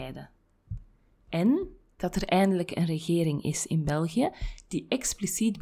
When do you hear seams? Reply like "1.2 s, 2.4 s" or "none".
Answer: 2.0 s